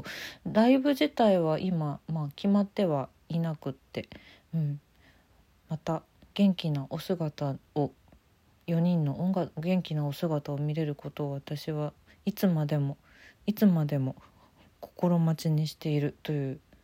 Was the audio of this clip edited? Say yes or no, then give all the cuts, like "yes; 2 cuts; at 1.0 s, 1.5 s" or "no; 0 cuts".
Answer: no; 0 cuts